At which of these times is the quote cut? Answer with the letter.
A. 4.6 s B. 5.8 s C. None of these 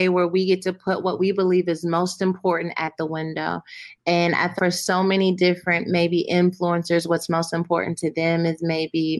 A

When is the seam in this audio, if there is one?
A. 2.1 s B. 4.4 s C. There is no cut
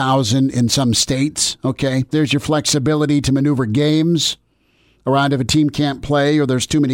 A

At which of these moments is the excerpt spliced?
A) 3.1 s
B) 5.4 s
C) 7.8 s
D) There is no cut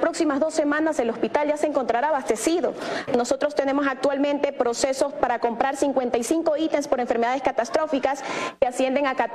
A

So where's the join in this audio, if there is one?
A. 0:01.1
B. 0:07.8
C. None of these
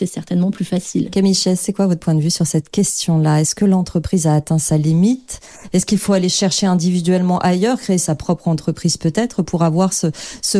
C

